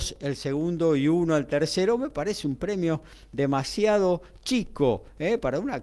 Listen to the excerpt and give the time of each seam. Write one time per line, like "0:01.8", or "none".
none